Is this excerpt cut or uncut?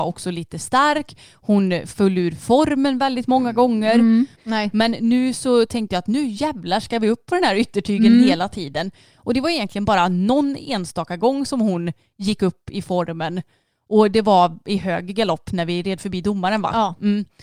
cut